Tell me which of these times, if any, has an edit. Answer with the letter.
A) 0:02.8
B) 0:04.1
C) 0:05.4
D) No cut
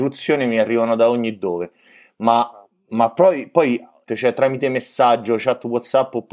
B